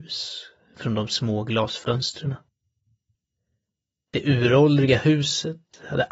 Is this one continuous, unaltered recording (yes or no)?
yes